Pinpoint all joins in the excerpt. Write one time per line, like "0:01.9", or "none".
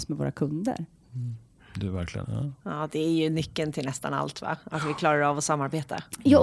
0:02.2